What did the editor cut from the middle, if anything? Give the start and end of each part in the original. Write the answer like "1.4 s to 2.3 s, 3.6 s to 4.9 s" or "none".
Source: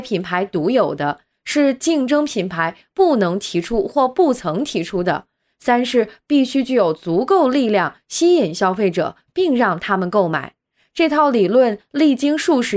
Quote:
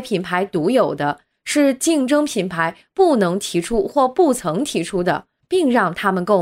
5.4 s to 9.2 s